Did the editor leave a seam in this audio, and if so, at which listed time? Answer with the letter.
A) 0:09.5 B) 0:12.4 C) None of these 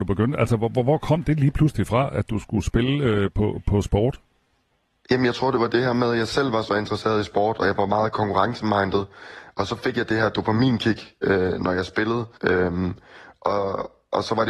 B